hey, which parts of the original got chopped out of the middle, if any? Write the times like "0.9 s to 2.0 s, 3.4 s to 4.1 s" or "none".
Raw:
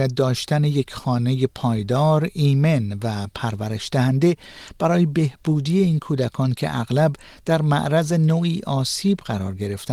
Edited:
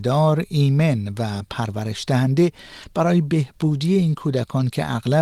none